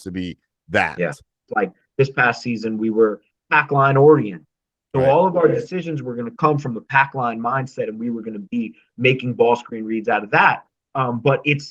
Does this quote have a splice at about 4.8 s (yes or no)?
no